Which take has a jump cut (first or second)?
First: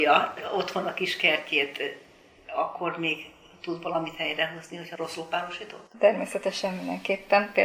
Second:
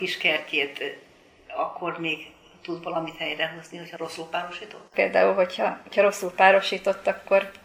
second